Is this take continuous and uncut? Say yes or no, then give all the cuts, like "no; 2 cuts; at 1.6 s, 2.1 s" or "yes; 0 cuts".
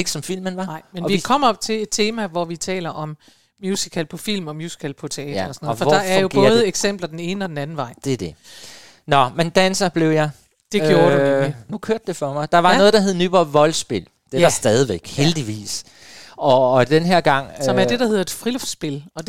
yes; 0 cuts